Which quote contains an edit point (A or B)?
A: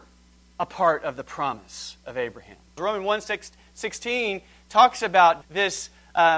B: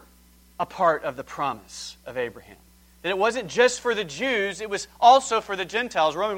A